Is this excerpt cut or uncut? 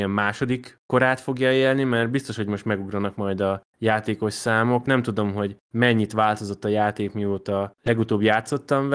uncut